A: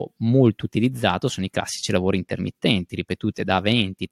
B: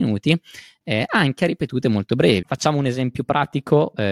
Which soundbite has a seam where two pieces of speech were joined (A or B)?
B